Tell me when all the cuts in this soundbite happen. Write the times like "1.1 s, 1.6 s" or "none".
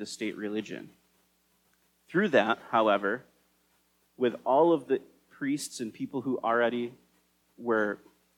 none